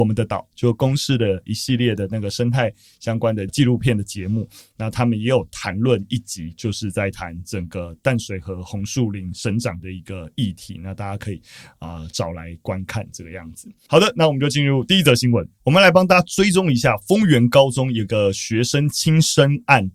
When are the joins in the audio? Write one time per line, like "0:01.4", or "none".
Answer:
none